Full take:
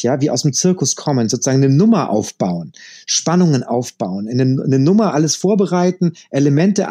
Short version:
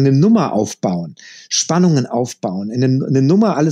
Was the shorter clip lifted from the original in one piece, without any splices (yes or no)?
yes